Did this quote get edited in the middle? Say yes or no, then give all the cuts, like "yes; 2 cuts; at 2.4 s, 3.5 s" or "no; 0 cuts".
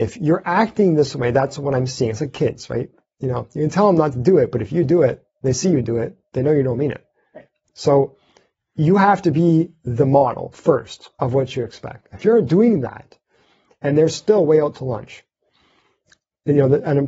no; 0 cuts